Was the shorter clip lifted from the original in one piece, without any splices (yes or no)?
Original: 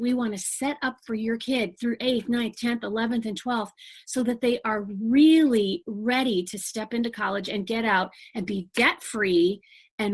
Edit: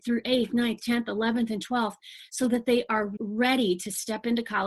no